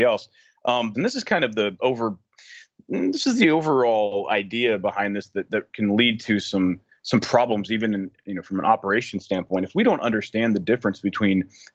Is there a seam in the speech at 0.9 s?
yes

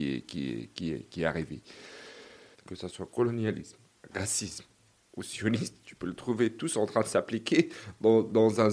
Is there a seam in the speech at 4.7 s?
no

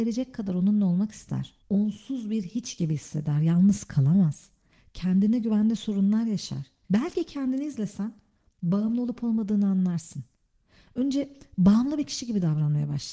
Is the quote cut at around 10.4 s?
no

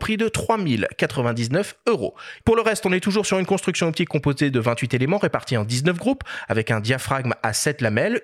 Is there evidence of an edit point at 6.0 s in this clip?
no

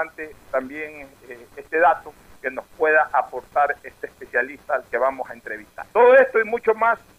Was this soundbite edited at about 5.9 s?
yes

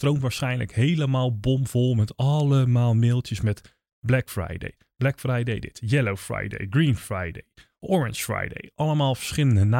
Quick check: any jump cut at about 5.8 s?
no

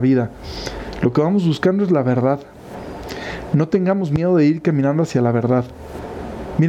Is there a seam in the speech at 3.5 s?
no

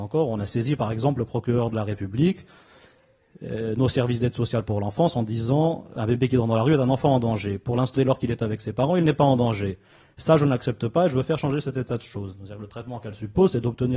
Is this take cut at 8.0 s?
yes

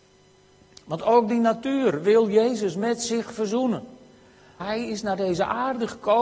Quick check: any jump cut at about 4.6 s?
yes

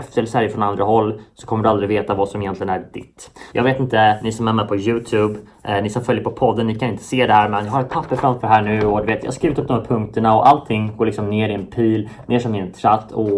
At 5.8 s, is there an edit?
no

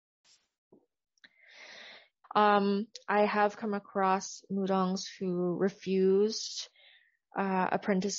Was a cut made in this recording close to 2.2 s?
yes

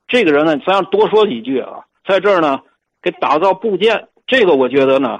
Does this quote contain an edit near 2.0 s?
yes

